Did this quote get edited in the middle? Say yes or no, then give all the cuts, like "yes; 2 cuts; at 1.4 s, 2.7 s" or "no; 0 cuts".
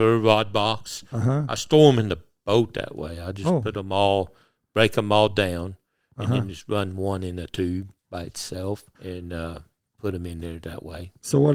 yes; 1 cut; at 8.9 s